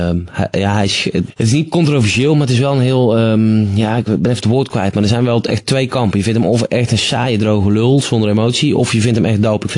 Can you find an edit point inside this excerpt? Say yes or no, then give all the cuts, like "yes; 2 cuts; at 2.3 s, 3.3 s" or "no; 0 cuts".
yes; 1 cut; at 1.3 s